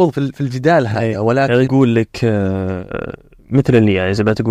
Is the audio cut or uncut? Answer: cut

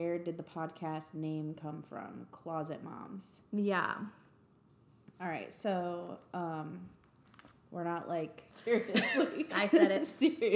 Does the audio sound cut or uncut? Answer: cut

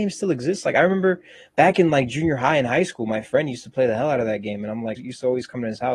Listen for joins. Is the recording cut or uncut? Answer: cut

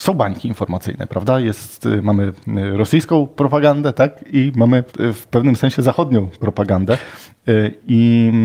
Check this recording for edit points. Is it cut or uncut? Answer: cut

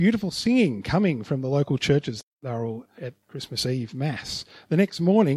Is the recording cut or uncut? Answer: cut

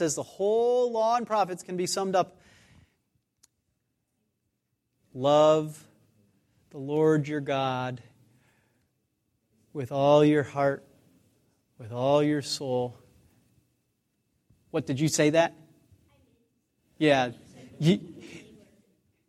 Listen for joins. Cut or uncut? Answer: uncut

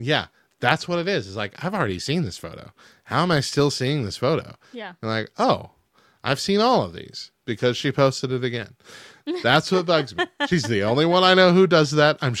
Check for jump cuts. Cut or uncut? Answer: uncut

